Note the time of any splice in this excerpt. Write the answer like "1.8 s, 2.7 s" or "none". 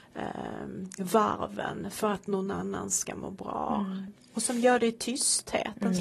none